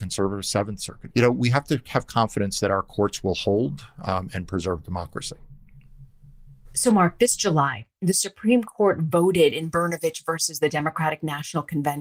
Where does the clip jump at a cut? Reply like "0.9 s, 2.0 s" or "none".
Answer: 1.1 s